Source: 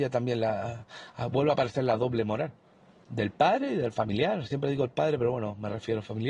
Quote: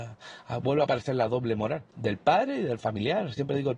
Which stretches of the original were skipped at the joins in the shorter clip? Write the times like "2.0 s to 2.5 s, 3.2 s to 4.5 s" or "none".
2.6 s to 3.0 s